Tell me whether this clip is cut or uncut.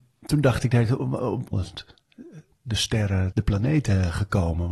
cut